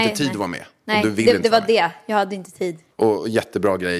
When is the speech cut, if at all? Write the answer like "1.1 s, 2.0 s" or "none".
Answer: 2.9 s